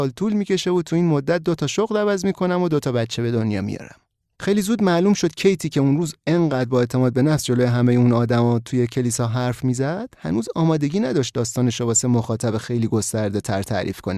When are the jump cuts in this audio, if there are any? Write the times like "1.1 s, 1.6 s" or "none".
4.4 s